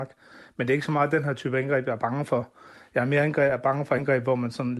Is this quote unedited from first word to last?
yes; 0 cuts

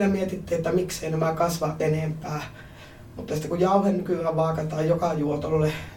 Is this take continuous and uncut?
yes; 0 cuts

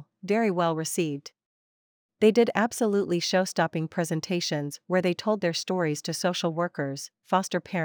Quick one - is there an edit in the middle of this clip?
yes; 1 cut; at 2.1 s

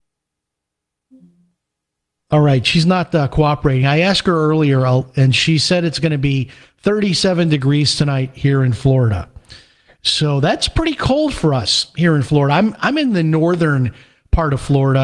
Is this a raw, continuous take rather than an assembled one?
yes; 0 cuts

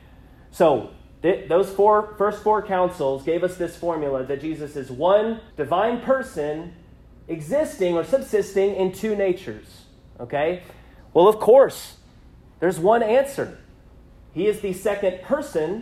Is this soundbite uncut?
no; 2 cuts; at 5.5 s, 11.0 s

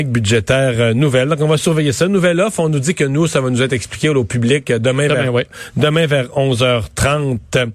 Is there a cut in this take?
no; 0 cuts

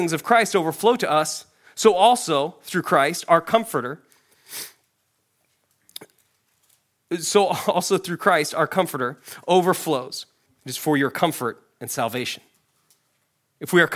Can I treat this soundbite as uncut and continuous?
no; 1 cut; at 10.5 s

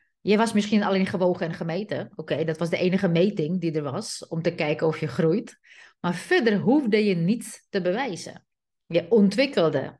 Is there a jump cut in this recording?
no; 0 cuts

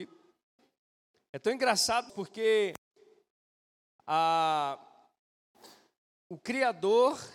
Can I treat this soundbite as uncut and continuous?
no; 1 cut; at 2.1 s

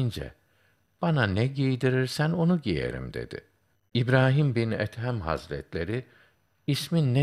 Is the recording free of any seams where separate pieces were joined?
yes; 0 cuts

